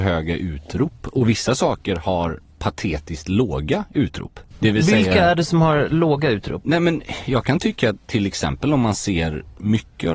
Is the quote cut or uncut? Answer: uncut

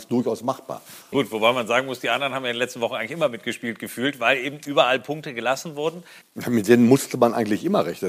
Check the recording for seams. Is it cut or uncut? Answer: cut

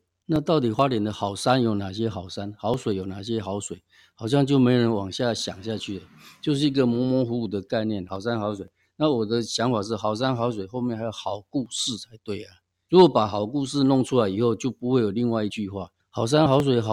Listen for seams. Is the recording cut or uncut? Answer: uncut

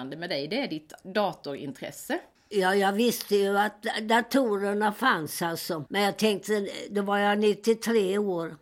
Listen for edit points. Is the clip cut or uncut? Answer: cut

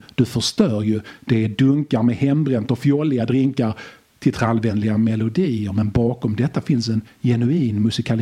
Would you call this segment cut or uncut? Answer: uncut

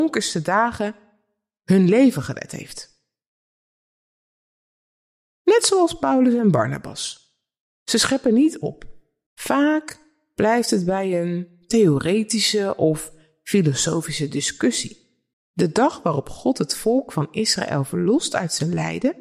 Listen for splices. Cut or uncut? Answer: cut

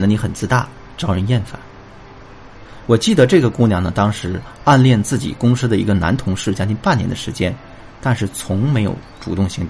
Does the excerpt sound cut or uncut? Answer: cut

